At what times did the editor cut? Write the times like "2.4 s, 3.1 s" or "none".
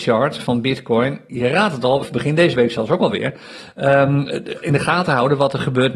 2.0 s